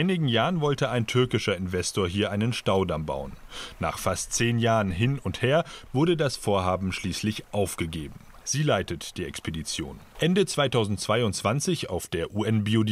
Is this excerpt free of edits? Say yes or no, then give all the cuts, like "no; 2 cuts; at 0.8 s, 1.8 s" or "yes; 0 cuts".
no; 3 cuts; at 5.9 s, 8.4 s, 10.1 s